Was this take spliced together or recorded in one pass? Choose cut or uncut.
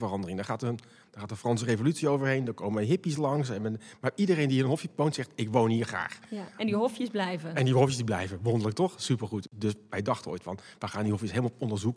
uncut